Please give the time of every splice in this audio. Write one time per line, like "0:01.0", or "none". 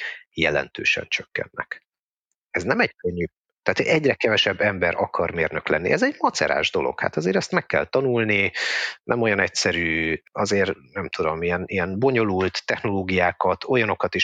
0:03.5